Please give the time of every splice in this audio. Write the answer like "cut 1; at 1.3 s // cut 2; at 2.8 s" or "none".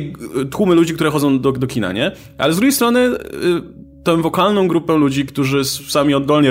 none